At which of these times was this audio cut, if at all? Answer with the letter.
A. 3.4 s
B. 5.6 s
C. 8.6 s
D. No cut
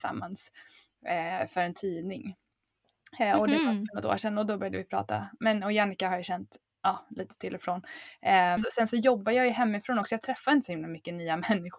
C